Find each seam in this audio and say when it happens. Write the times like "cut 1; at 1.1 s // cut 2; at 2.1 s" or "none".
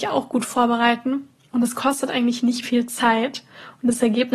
cut 1; at 2.6 s